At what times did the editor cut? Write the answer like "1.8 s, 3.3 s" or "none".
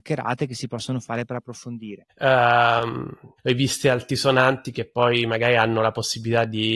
2.1 s, 3.4 s